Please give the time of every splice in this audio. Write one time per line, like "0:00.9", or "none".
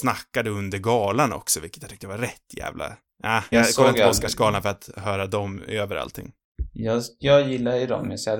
0:03.5